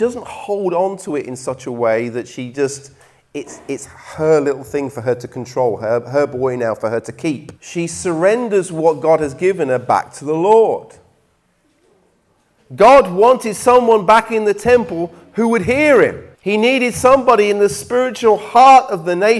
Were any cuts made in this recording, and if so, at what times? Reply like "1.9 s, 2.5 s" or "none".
7.5 s, 12.6 s, 16.3 s